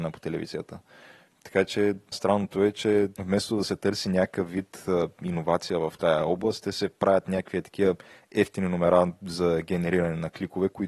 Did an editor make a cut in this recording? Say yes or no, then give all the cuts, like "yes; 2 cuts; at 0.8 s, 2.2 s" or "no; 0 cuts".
yes; 2 cuts; at 2.1 s, 3.1 s